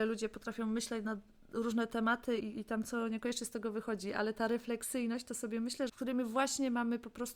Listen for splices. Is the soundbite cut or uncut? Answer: cut